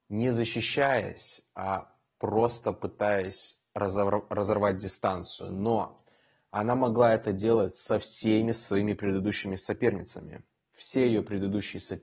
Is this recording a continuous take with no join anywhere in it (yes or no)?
yes